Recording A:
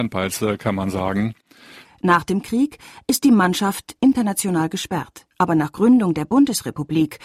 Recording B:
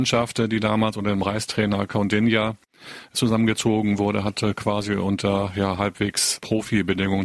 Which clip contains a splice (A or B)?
A